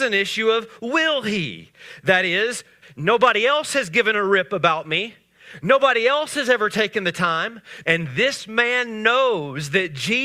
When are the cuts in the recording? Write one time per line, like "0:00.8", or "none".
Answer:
0:02.8
0:07.8